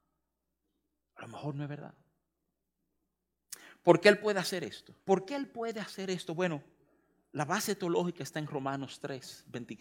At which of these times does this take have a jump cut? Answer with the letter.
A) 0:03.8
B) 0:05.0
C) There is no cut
B